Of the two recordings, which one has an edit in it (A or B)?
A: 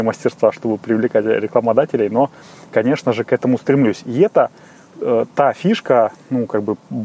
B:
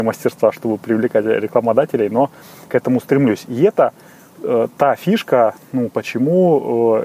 B